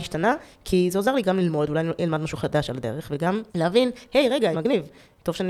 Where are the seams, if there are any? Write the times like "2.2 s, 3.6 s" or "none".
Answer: 3.5 s, 4.5 s